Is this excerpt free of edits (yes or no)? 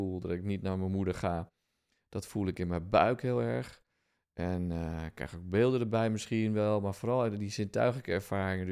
yes